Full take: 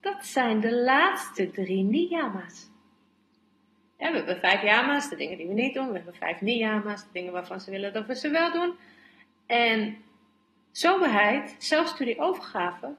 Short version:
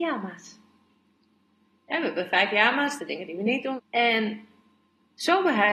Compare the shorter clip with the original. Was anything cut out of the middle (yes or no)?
yes